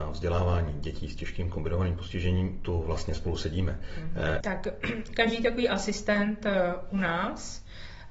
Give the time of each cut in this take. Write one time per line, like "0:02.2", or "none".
0:04.4